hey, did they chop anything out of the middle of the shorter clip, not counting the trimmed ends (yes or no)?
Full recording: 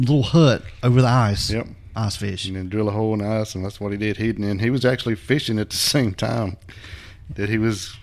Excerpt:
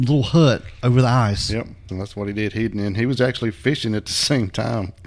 yes